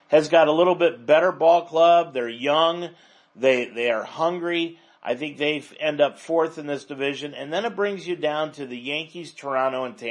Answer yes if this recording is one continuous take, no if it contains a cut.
yes